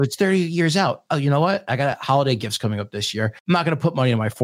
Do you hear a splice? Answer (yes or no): yes